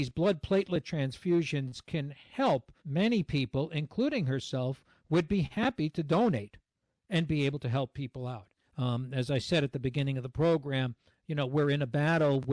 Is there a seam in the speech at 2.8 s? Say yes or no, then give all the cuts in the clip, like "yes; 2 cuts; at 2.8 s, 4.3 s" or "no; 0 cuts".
yes; 2 cuts; at 2.8 s, 8.6 s